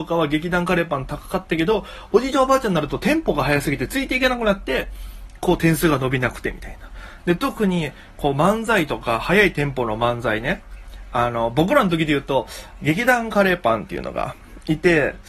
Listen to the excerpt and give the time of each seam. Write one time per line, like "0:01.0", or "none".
0:07.2